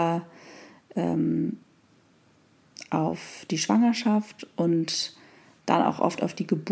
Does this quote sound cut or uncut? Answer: uncut